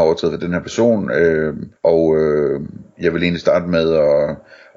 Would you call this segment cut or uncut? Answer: cut